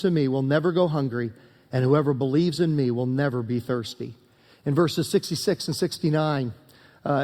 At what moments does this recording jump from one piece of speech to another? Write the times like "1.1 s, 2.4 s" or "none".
none